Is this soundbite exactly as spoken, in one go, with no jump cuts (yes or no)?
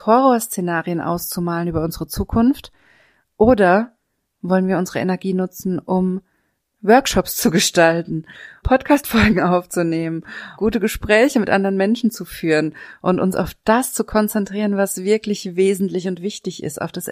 no